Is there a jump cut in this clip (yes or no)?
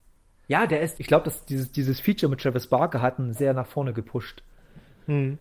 yes